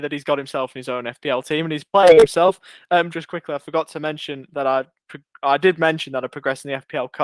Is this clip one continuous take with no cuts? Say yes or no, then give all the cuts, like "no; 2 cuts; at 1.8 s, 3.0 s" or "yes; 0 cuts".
no; 1 cut; at 3.1 s